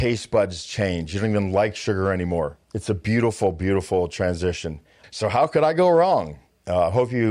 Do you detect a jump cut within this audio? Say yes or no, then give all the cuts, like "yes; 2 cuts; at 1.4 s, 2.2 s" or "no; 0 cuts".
yes; 2 cuts; at 2.6 s, 5.0 s